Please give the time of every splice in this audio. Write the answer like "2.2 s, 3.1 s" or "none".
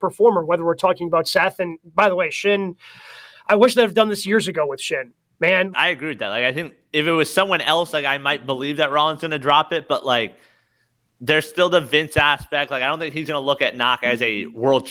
5.7 s